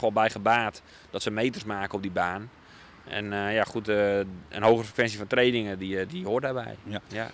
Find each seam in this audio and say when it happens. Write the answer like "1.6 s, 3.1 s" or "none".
6.1 s